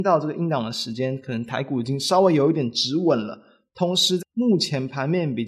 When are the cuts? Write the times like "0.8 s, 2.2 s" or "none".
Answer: 4.2 s